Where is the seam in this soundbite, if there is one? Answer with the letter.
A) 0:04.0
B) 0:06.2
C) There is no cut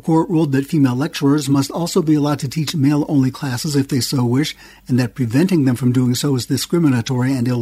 C